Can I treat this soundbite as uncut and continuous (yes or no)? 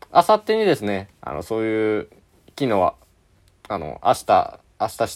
yes